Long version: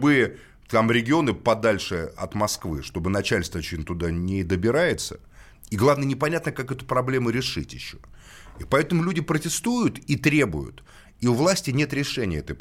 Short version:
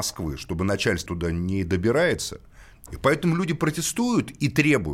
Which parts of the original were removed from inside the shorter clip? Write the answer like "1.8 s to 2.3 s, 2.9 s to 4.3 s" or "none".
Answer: 3.5 s to 3.9 s, 5.7 s to 8.5 s